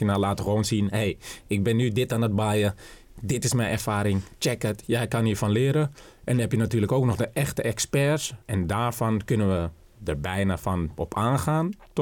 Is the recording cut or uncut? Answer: cut